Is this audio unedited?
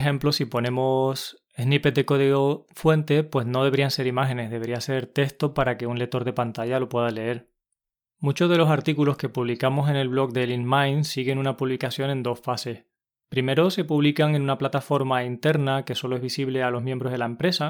yes; 0 cuts

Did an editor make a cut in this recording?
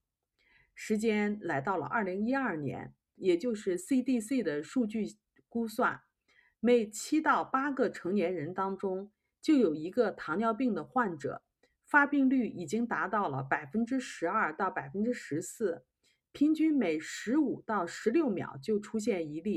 yes; 1 cut; at 3.2 s

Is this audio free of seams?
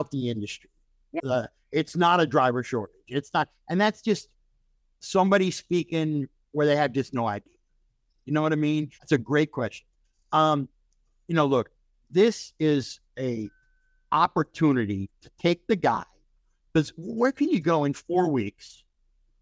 no; 2 cuts; at 1.2 s, 9.0 s

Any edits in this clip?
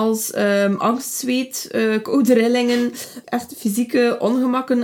yes; 1 cut; at 3.2 s

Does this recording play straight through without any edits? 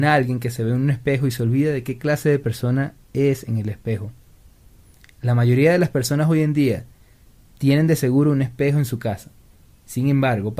yes; 0 cuts

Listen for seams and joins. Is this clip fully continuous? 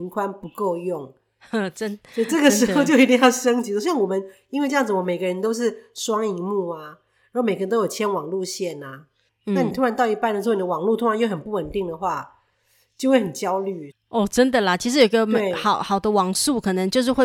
no; 2 cuts; at 9.3 s, 13.9 s

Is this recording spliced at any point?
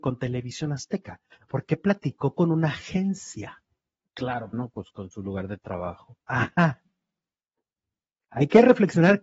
yes; 1 cut; at 4.5 s

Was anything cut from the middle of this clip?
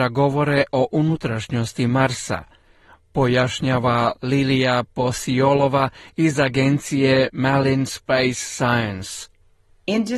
no; 0 cuts

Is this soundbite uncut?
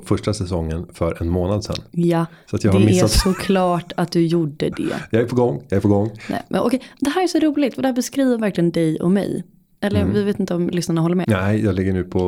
no; 1 cut; at 11.2 s

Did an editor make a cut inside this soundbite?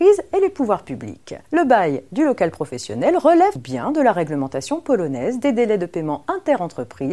yes; 2 cuts; at 1.4 s, 3.6 s

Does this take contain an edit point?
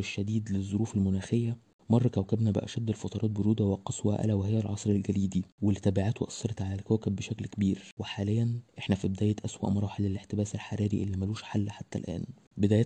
yes; 1 cut; at 8.7 s

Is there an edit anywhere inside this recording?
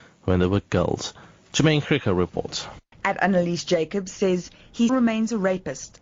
yes; 2 cuts; at 2.9 s, 4.9 s

